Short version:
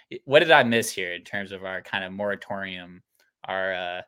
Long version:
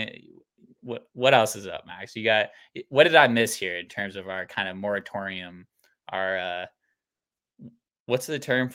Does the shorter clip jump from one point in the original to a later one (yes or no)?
no